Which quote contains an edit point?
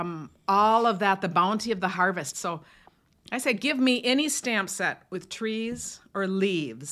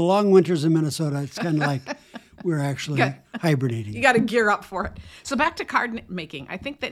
first; 1 cut; at 2.3 s

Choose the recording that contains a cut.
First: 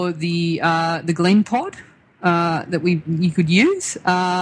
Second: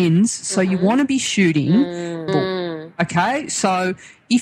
second; 1 cut; at 2.3 s

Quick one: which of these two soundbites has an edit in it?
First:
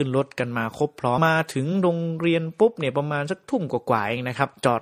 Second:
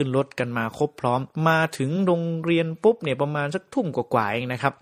first; 1 cut; at 1.2 s

